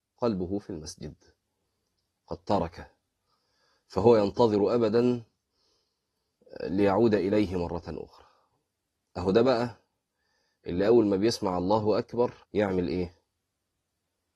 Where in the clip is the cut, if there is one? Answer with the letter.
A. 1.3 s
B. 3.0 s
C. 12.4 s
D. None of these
C